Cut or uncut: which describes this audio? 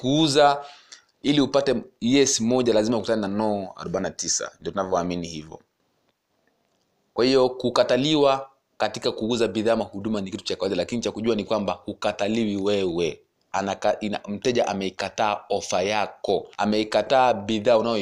cut